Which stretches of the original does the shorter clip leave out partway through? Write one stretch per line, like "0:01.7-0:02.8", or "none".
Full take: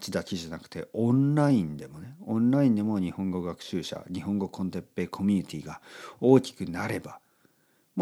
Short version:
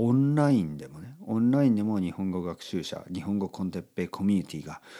none